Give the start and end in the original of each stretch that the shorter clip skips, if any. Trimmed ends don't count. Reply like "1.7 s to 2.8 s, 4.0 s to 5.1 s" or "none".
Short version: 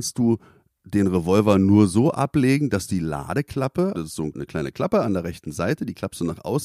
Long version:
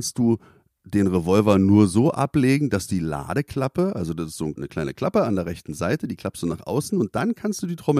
3.9 s to 4.2 s